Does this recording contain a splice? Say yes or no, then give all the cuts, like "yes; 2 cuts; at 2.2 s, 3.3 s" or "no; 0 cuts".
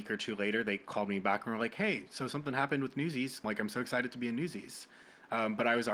yes; 1 cut; at 3.4 s